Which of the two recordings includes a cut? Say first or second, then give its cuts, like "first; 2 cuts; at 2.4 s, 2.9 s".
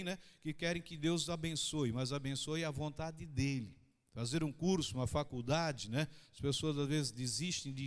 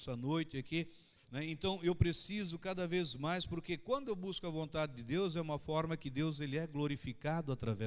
second; 1 cut; at 1.2 s